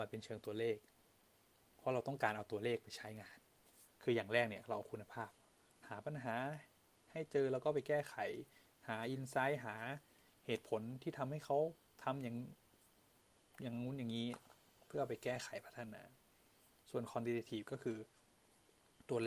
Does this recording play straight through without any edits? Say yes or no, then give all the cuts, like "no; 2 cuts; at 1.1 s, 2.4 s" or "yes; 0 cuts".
no; 1 cut; at 3.9 s